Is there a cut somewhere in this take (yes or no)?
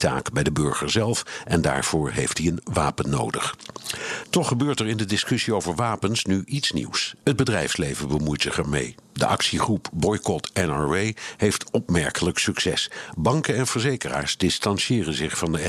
no